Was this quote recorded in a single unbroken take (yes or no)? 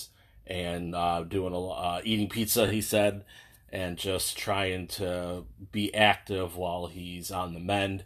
yes